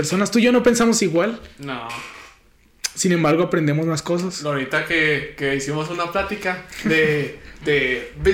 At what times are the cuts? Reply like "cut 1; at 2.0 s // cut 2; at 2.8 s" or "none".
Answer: none